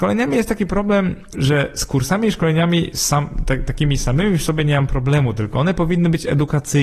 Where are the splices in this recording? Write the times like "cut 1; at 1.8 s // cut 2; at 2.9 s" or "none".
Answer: cut 1; at 1.3 s